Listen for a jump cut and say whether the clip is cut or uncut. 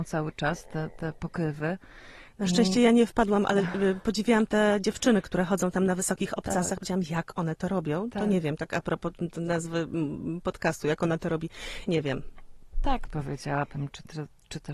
cut